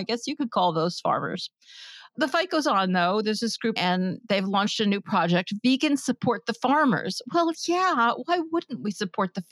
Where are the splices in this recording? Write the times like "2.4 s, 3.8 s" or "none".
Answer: 3.8 s